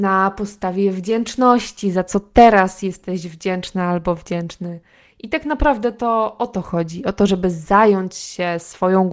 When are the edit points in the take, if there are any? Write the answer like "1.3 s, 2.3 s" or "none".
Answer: none